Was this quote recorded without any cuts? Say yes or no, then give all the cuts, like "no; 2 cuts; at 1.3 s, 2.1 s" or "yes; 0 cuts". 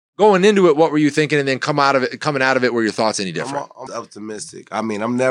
no; 1 cut; at 3.9 s